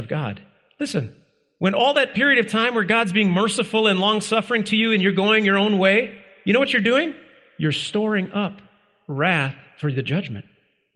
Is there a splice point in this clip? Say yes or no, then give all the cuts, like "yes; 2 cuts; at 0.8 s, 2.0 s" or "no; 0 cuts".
no; 0 cuts